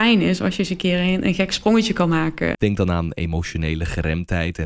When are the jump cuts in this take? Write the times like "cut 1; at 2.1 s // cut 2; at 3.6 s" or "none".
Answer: cut 1; at 2.5 s